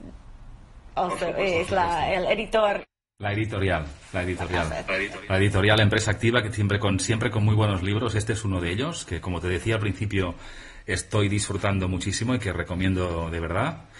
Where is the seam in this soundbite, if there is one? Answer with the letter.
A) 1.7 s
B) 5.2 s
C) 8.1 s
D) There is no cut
D